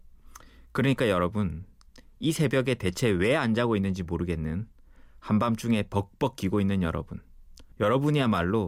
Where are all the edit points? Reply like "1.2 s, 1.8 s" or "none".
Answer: 7.7 s